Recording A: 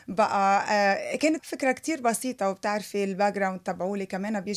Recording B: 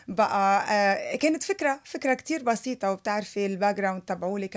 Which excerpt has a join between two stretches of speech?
A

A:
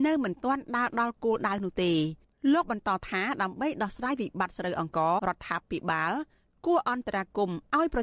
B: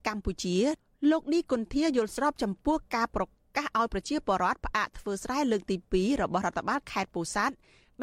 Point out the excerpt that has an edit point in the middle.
A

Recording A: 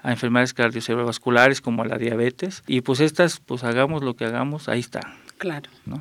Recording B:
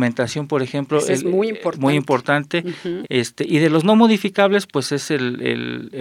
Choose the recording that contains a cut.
B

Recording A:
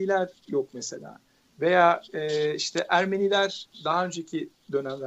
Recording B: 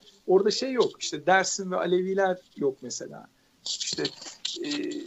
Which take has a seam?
B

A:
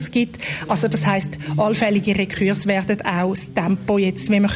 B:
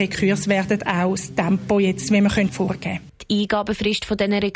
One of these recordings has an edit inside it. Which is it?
B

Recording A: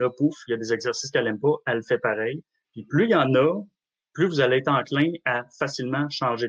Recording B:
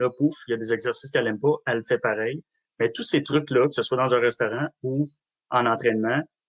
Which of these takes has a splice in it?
A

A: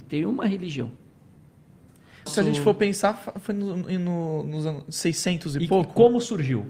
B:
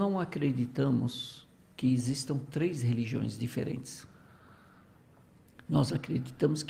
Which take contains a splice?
A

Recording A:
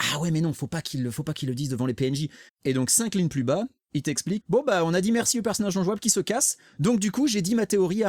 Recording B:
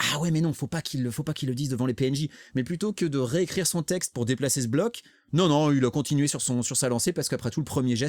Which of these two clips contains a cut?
A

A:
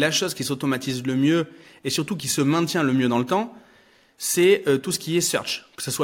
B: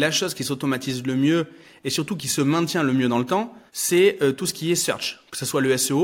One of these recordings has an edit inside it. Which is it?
B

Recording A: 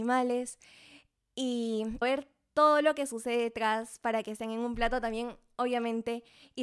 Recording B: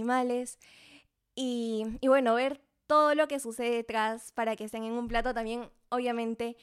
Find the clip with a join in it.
A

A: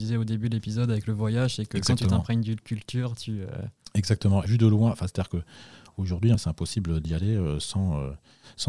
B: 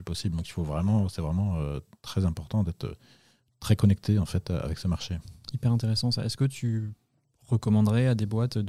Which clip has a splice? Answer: A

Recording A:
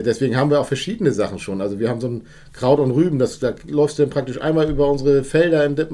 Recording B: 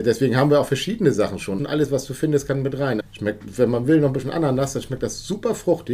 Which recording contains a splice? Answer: B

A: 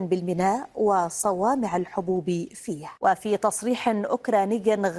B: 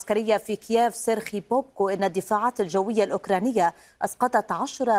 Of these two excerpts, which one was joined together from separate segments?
A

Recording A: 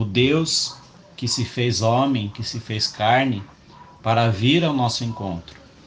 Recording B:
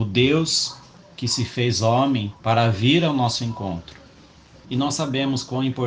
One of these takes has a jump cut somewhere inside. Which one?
B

